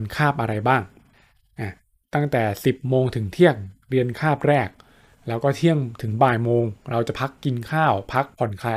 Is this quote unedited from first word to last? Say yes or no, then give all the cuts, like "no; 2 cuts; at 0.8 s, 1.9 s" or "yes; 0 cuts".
yes; 0 cuts